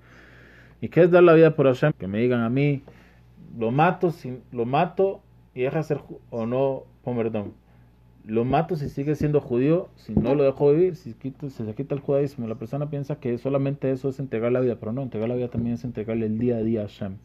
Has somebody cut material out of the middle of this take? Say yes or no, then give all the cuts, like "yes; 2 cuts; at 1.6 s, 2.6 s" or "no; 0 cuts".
yes; 1 cut; at 1.9 s